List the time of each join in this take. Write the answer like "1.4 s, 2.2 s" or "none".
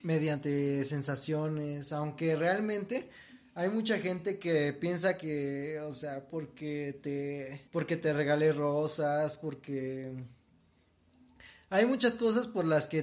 6.3 s, 7.7 s